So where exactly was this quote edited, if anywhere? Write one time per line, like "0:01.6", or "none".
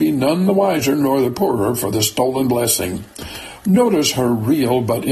0:03.6